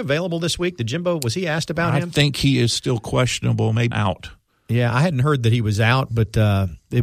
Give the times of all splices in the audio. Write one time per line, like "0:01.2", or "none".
0:03.9